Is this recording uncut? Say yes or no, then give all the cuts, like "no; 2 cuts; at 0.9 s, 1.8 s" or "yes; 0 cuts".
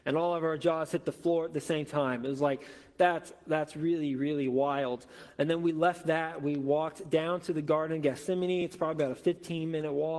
yes; 0 cuts